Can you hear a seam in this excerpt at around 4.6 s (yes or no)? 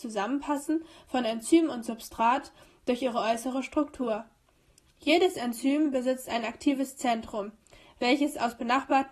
no